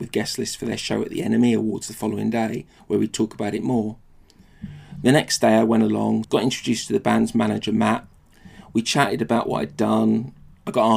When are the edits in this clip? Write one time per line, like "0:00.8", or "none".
0:06.2